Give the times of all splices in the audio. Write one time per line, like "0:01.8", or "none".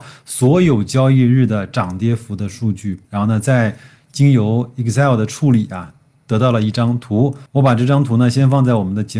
none